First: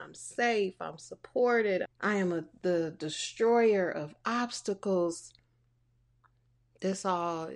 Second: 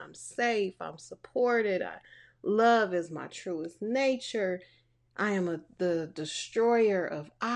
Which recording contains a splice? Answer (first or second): first